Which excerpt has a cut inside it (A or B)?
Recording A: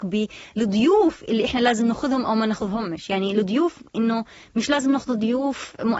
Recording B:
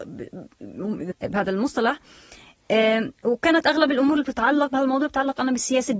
B